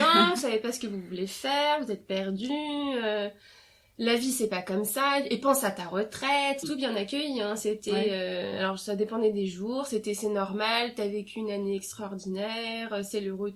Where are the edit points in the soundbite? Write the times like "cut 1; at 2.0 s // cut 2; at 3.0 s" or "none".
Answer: cut 1; at 6.6 s